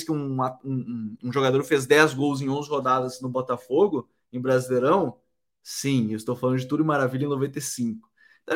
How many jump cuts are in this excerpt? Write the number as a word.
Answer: zero